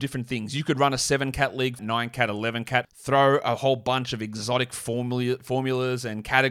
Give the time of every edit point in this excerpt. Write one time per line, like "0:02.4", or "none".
0:01.8
0:02.8